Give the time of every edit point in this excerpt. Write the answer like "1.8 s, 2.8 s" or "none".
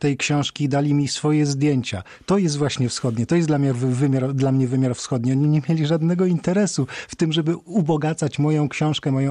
none